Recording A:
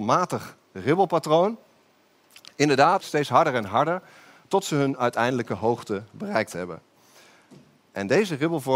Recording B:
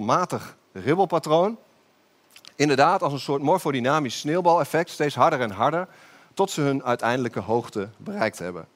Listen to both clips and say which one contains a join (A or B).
A